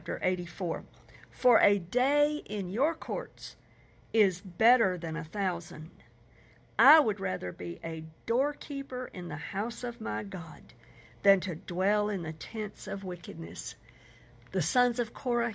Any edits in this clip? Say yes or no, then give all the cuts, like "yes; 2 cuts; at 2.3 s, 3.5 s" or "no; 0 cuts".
no; 0 cuts